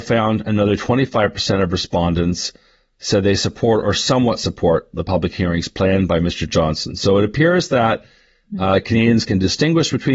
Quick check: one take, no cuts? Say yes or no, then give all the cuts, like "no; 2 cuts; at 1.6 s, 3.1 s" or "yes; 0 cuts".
yes; 0 cuts